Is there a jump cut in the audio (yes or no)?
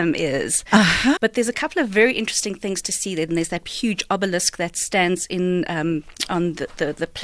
yes